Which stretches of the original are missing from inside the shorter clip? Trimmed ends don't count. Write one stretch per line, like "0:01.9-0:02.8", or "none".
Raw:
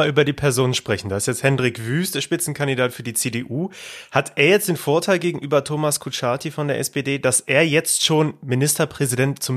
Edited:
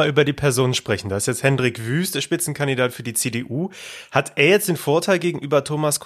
none